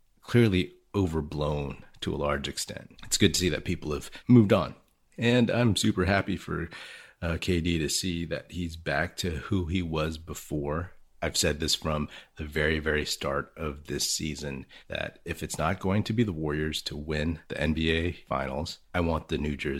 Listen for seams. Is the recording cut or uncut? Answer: uncut